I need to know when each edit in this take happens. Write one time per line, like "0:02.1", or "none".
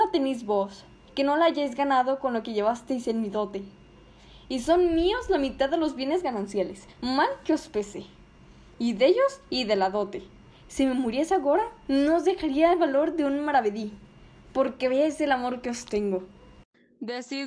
none